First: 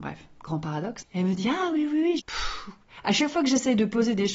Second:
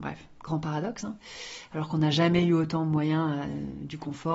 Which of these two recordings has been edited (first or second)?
first